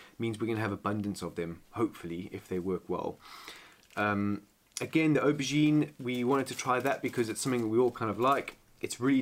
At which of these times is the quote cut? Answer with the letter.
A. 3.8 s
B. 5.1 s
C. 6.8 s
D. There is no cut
D